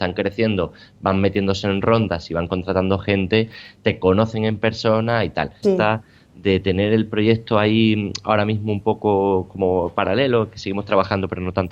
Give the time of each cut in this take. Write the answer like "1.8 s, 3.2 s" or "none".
5.6 s